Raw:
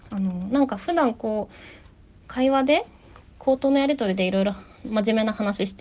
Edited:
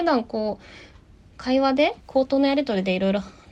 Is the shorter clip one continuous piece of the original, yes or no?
no